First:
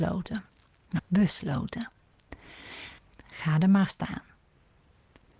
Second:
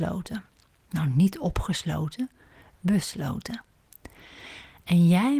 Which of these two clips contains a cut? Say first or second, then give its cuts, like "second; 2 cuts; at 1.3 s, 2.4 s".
first; 2 cuts; at 1.0 s, 3.0 s